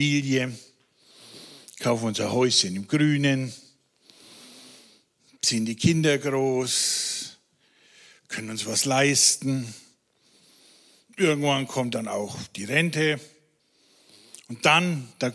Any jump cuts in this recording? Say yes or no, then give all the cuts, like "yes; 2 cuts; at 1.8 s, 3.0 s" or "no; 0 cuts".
no; 0 cuts